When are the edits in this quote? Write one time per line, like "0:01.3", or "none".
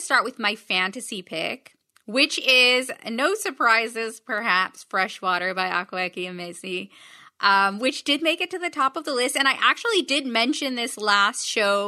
none